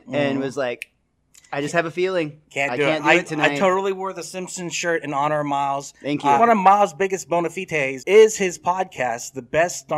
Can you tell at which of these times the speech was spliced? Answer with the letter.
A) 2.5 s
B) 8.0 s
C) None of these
B